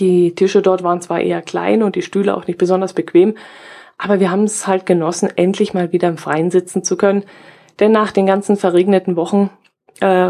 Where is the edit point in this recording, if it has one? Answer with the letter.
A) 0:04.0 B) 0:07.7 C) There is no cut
C